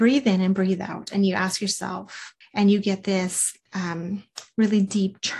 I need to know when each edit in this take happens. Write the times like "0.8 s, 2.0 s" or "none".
2.4 s, 3.7 s